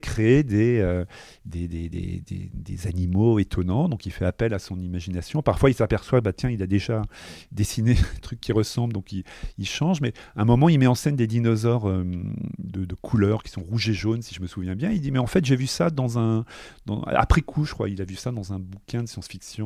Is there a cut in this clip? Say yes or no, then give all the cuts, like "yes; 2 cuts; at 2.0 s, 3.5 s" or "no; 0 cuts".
no; 0 cuts